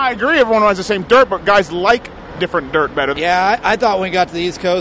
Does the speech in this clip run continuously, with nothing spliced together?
no; 1 cut; at 3.1 s

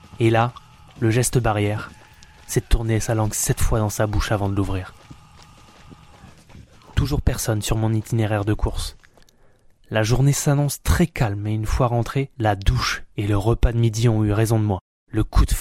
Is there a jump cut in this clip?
no; 0 cuts

